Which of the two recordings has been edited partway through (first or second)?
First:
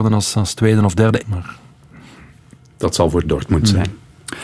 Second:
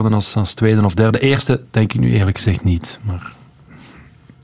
first